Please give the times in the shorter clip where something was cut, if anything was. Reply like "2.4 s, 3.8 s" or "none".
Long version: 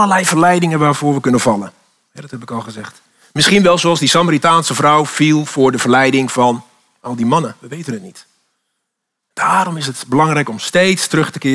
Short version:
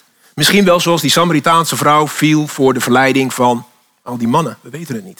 none